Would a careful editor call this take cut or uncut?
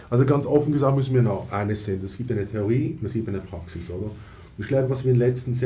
uncut